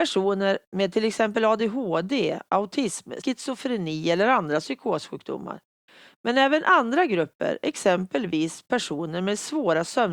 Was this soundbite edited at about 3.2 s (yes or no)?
yes